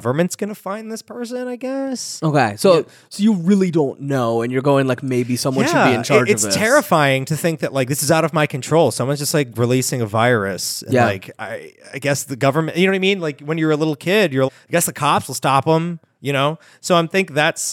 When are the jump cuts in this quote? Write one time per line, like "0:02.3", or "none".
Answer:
0:14.5
0:16.1